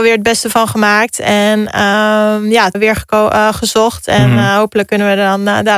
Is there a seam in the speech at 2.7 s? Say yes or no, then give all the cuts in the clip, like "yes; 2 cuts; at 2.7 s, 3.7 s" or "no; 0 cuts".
yes; 1 cut; at 2.7 s